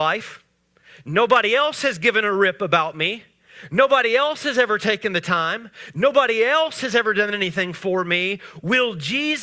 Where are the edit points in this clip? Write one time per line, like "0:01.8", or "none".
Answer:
none